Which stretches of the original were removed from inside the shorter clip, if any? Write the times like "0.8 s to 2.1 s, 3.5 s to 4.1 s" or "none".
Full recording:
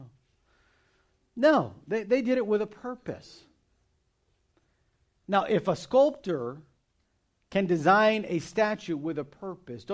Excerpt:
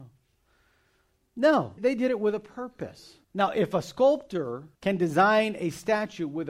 1.8 s to 2.0 s, 3.5 s to 5.2 s, 6.7 s to 7.4 s